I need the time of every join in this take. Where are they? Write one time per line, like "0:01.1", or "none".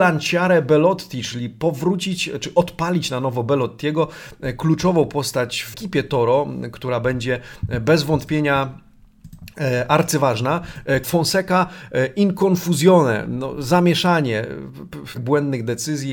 0:05.7
0:11.0
0:15.1